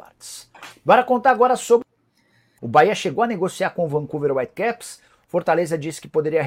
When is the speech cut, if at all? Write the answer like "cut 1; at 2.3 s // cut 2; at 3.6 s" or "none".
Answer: cut 1; at 2.6 s